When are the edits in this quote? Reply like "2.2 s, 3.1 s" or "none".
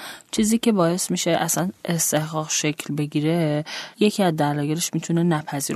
3.9 s